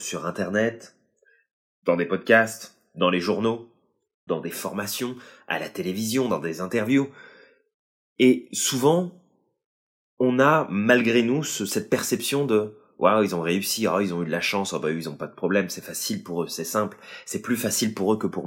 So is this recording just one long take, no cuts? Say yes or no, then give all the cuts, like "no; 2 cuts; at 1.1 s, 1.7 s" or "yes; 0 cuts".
no; 1 cut; at 4.3 s